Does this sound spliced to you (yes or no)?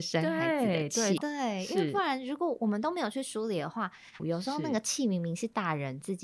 yes